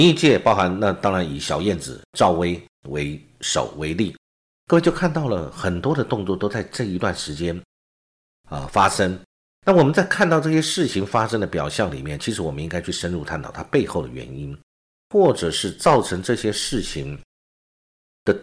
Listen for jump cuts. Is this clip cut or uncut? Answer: uncut